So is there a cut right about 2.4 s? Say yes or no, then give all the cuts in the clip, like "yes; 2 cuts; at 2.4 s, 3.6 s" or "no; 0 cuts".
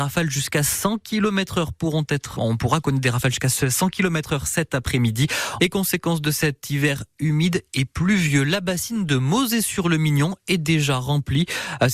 yes; 2 cuts; at 2.4 s, 5.6 s